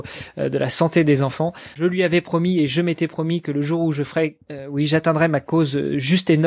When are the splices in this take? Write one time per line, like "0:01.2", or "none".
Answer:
0:01.7